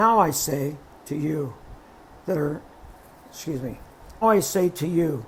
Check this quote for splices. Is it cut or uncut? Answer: cut